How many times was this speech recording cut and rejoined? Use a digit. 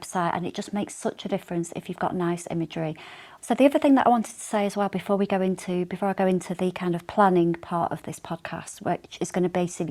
1